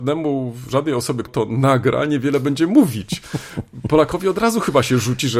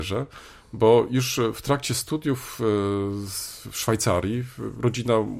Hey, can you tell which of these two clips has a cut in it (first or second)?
first